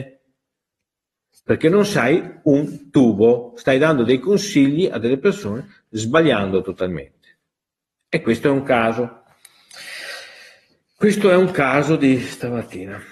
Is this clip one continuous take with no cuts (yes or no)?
yes